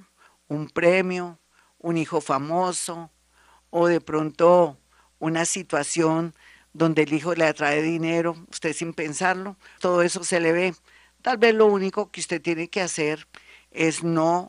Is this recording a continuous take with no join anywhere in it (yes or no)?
no